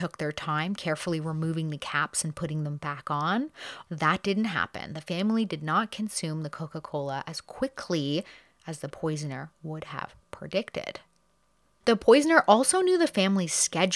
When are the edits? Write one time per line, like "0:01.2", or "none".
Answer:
0:03.9